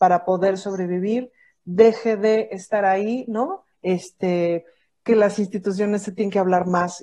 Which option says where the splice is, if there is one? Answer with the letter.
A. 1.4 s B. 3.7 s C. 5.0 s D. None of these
B